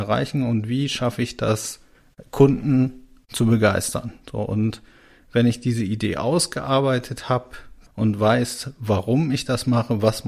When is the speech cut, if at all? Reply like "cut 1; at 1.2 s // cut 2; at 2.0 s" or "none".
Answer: none

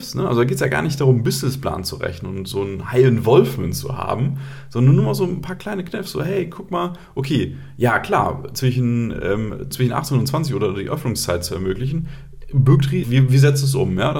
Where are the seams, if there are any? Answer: cut 1; at 9.7 s // cut 2; at 13.0 s

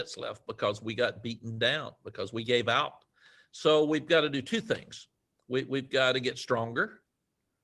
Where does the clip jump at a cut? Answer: none

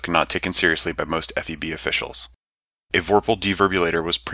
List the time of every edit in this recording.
cut 1; at 2.7 s

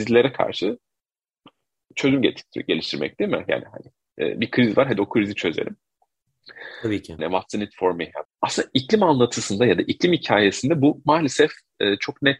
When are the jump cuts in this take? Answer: cut 1; at 7.2 s // cut 2; at 8.3 s

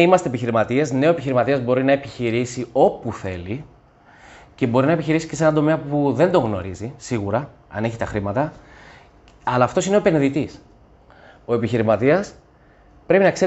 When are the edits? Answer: none

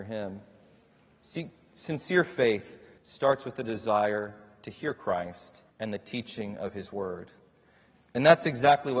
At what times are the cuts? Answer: cut 1; at 3.0 s // cut 2; at 5.7 s

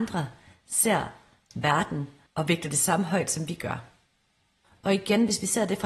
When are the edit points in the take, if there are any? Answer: none

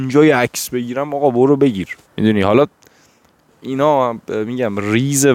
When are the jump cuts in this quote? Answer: cut 1; at 2.1 s

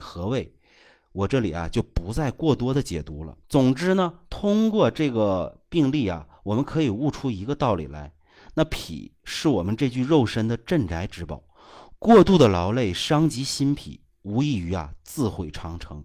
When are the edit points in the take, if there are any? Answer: cut 1; at 3.4 s

